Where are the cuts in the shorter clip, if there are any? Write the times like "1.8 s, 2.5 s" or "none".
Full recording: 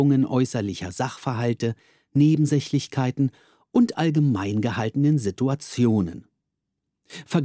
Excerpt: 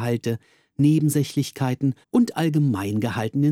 2.0 s